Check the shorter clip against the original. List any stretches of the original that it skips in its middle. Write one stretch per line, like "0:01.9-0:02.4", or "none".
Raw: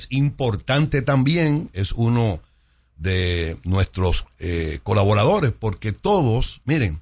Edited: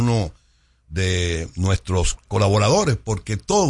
0:04.3-0:04.8